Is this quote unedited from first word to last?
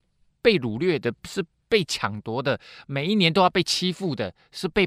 yes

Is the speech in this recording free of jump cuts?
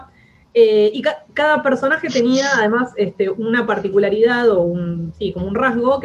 yes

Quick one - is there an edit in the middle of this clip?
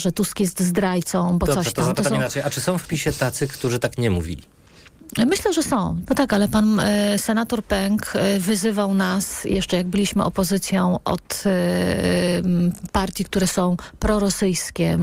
yes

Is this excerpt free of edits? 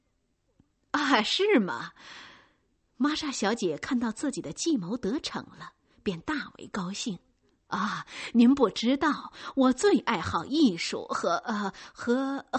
yes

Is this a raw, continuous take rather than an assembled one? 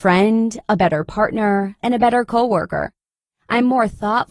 no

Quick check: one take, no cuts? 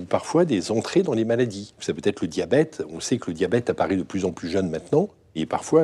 yes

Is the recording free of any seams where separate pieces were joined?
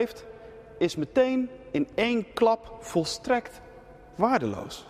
yes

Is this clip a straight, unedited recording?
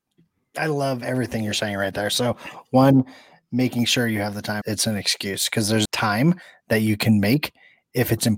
no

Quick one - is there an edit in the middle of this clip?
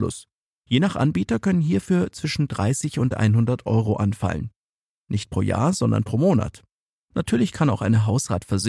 yes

